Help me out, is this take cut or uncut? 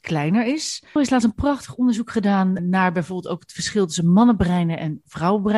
cut